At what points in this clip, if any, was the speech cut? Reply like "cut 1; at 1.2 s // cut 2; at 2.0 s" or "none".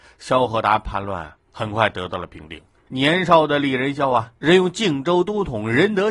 cut 1; at 2.9 s // cut 2; at 4.4 s